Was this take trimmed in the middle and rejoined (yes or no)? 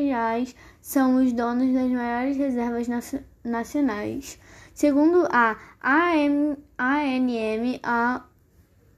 no